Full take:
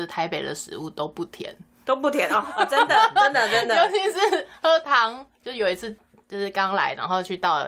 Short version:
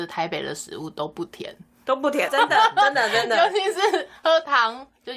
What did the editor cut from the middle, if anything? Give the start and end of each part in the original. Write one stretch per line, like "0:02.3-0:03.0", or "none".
0:02.3-0:02.7